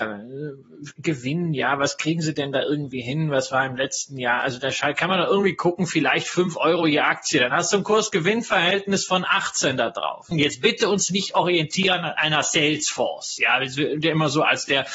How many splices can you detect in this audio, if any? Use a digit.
1